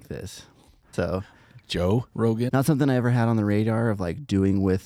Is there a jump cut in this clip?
yes; 2 cuts; at 0.9 s, 2.5 s

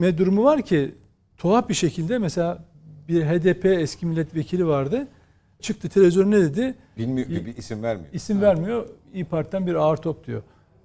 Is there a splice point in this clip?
yes; 2 cuts; at 5.6 s, 7.0 s

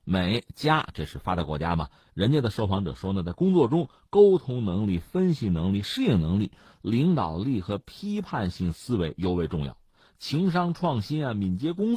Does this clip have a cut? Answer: no; 0 cuts

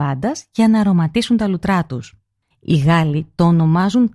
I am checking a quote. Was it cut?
yes; 1 cut; at 2.5 s

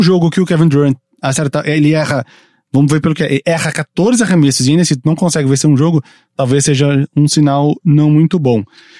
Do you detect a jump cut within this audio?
no; 0 cuts

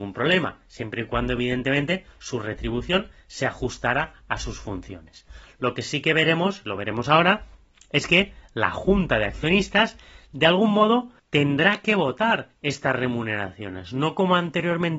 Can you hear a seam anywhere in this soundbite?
no; 0 cuts

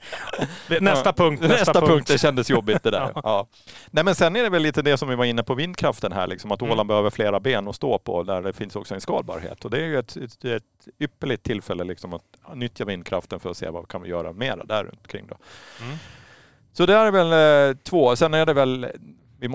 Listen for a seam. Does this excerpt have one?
no; 0 cuts

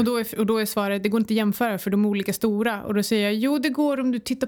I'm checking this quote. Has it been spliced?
no; 0 cuts

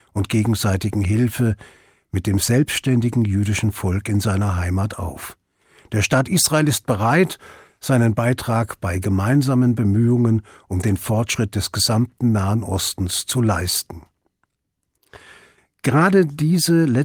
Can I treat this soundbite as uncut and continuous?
yes; 0 cuts

